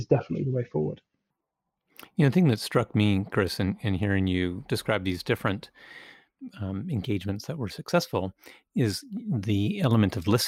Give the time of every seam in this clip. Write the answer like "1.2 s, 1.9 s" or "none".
none

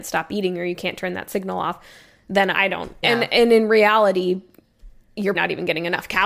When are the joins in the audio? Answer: 3.0 s, 5.3 s

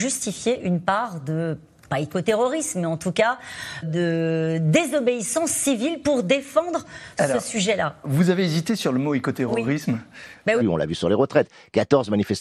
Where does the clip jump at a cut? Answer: 3.8 s, 8.0 s, 10.6 s

